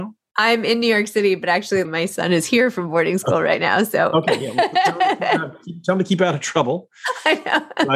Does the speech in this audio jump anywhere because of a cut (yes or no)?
yes